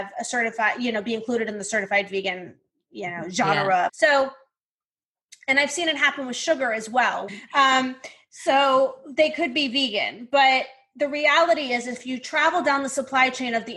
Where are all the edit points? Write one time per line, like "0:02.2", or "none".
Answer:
0:03.9
0:07.3